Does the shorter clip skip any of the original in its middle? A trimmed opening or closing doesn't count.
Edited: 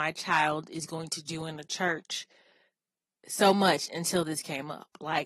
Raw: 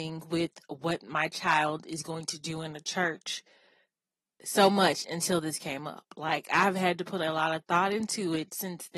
no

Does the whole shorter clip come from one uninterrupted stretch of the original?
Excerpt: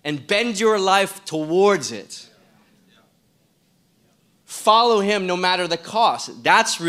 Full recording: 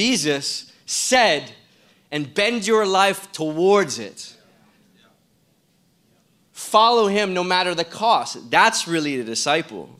yes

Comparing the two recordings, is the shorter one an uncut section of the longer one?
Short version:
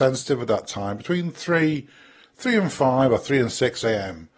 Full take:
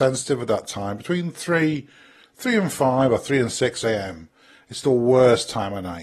yes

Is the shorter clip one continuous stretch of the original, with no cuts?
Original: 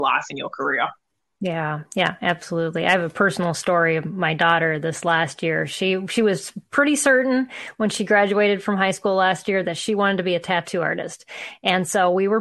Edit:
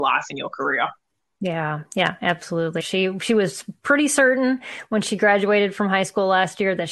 no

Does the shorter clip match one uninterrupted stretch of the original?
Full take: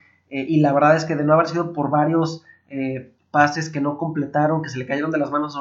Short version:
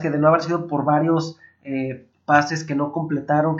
yes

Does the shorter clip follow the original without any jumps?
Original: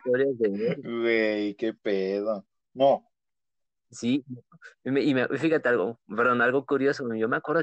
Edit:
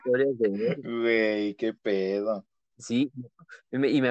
no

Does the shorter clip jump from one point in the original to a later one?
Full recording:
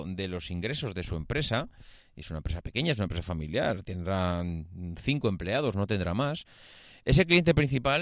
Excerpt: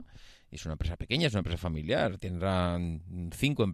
no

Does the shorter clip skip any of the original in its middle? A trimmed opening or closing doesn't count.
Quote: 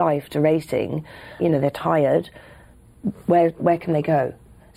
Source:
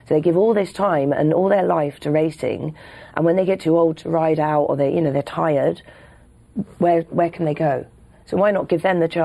yes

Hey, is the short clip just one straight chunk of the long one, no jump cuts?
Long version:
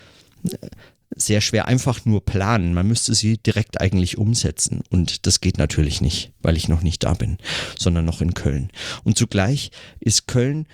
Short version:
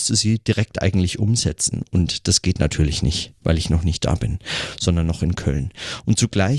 yes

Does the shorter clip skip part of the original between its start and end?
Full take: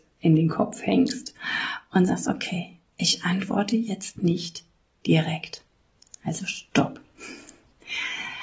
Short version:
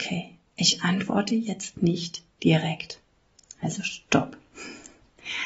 yes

